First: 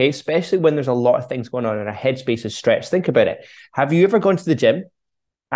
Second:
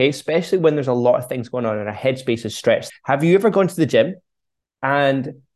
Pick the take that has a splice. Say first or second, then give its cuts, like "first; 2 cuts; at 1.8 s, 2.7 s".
second; 1 cut; at 2.9 s